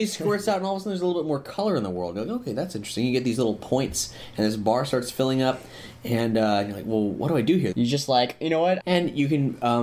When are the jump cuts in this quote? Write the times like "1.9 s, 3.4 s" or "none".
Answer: 7.7 s, 8.8 s